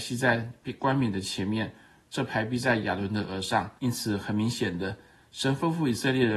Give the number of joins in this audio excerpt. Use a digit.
1